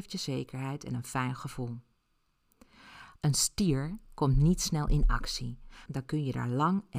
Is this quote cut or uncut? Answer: cut